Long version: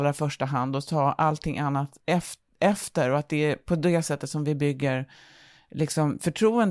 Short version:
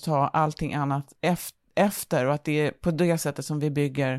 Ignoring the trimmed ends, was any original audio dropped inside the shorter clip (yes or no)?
no